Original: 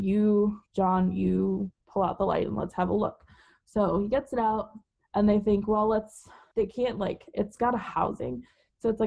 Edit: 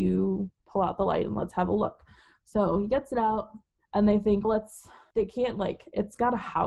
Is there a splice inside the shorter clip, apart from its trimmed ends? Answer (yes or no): yes